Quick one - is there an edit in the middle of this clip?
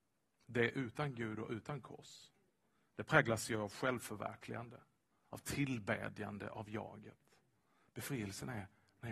yes; 1 cut; at 7.9 s

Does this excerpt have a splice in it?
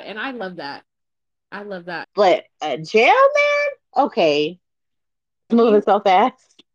yes; 2 cuts; at 2.0 s, 5.5 s

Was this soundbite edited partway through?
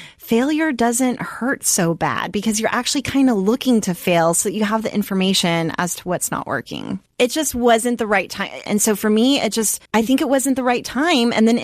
yes; 3 cuts; at 7.1 s, 8.7 s, 9.9 s

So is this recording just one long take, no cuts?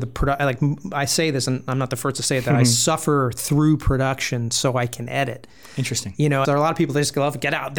no; 1 cut; at 6.4 s

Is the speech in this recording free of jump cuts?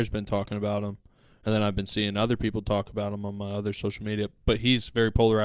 yes; 0 cuts

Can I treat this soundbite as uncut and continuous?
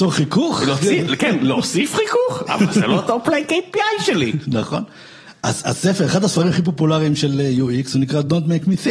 no; 1 cut; at 2.5 s

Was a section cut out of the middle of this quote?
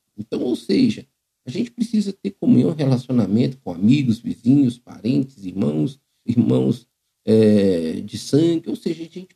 yes; 1 cut; at 6.3 s

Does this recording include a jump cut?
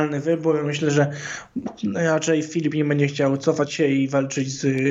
no; 0 cuts

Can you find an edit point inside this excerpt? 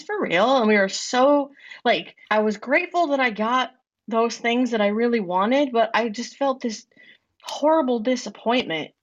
yes; 1 cut; at 2.2 s

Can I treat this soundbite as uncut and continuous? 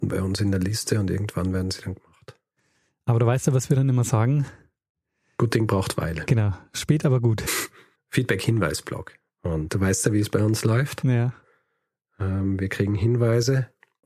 no; 2 cuts; at 8.0 s, 9.2 s

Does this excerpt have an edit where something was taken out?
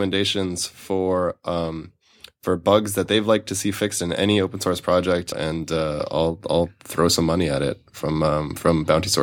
yes; 1 cut; at 5.3 s

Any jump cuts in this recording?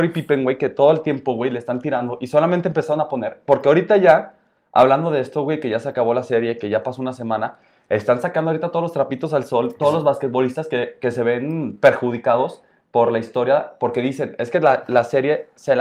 no; 0 cuts

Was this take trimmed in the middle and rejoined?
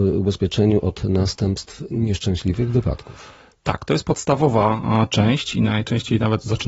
no; 0 cuts

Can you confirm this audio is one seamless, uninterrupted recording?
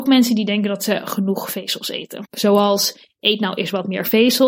no; 1 cut; at 2.2 s

